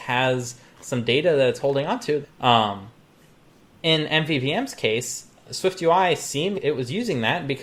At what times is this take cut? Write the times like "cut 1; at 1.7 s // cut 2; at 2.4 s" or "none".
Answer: cut 1; at 2.2 s // cut 2; at 6.5 s